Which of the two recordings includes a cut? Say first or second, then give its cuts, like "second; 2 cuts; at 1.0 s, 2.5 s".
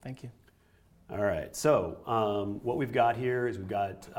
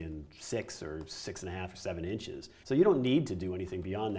second; 1 cut; at 2.6 s